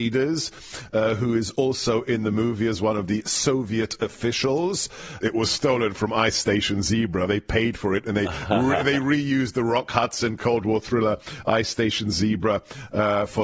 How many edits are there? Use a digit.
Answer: 2